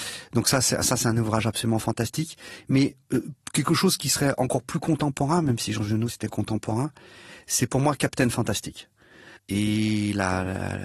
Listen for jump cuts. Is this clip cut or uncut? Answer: cut